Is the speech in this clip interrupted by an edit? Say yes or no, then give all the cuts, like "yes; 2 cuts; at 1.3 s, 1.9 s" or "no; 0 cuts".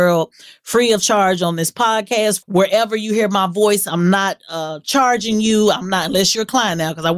yes; 1 cut; at 2.4 s